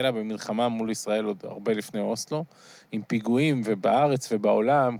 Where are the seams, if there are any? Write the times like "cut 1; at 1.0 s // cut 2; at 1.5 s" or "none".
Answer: none